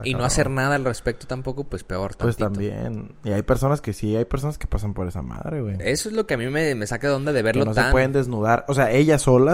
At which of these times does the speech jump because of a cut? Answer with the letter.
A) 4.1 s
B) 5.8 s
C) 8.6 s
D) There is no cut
D